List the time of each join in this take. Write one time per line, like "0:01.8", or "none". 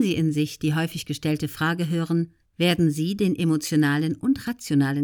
0:02.5